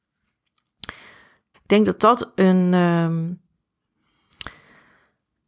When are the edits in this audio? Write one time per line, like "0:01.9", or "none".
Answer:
0:01.5